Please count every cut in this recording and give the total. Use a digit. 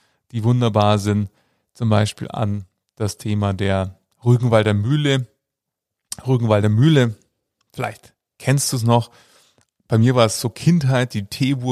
0